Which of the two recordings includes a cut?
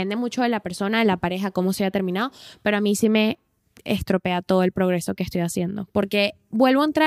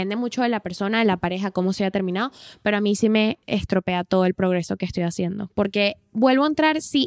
second; 1 cut; at 3.4 s

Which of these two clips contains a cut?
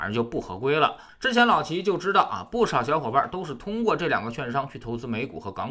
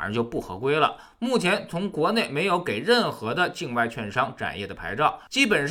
first; 1 cut; at 1.1 s

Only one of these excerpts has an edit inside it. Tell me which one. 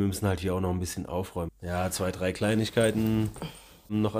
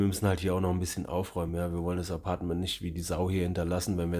first; 1 cut; at 1.5 s

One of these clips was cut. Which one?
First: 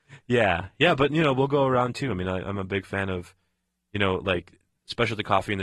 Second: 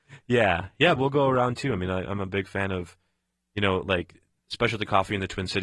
second; 1 cut; at 1.0 s

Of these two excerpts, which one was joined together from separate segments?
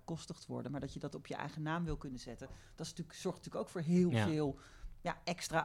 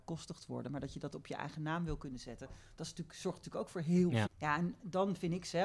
second; 1 cut; at 4.3 s

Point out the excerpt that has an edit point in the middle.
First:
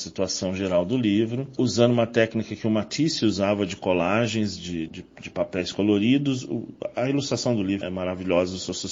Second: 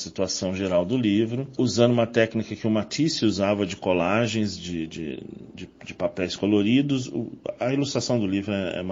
first; 2 cuts; at 4.9 s, 7.8 s

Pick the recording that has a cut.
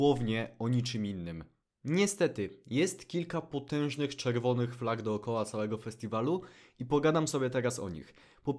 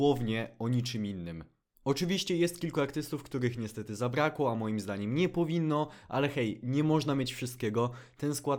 second; 1 cut; at 1.7 s

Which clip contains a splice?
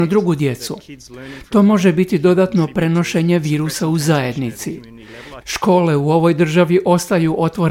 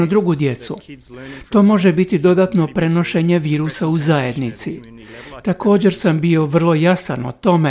first; 1 cut; at 5.4 s

